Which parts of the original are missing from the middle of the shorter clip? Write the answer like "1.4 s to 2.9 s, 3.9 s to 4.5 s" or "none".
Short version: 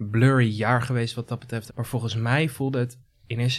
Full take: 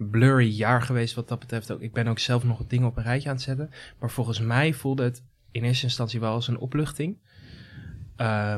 1.7 s to 3.9 s

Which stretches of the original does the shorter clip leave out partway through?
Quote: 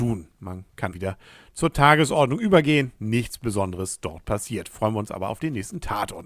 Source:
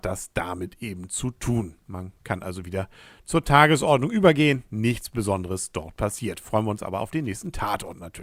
2.4 s to 2.6 s

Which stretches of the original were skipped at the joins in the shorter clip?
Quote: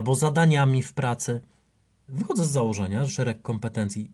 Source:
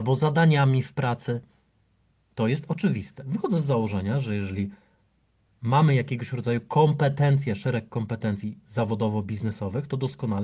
2.1 s to 3.2 s, 4.2 s to 7.5 s

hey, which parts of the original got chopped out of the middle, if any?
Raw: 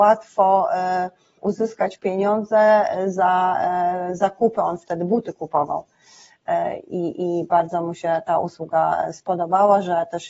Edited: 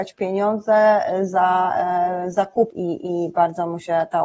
4.5 s to 6.9 s

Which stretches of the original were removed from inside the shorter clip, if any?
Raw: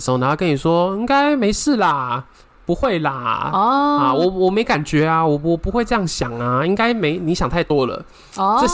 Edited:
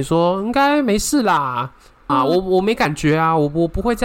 2.6 s to 4.0 s

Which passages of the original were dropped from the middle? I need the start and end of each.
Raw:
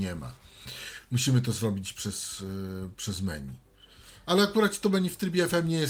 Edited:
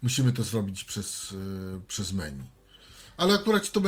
none

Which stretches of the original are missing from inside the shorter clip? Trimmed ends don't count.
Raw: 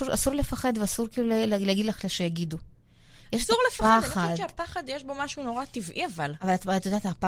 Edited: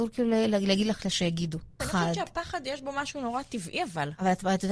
2.8 s to 4.0 s

